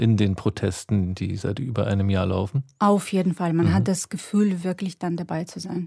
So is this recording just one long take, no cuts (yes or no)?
yes